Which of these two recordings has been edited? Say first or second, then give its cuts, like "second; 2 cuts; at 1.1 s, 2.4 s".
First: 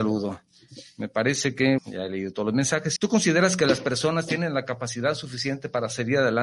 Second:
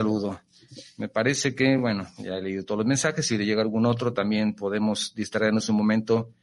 first; 2 cuts; at 1.8 s, 3.0 s